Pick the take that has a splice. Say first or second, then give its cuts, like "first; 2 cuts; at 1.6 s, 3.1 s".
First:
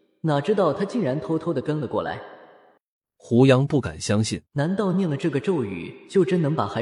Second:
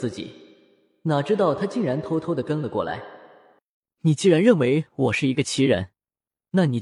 first; 2 cuts; at 3.0 s, 4.5 s